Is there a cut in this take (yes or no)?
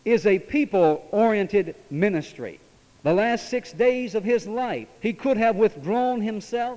yes